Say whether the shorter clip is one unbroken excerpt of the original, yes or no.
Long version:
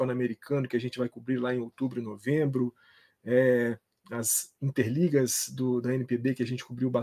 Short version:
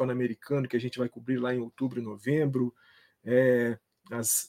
yes